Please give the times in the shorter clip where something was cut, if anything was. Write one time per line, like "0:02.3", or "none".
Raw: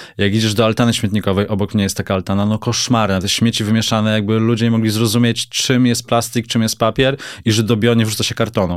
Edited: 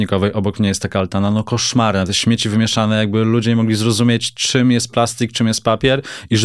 none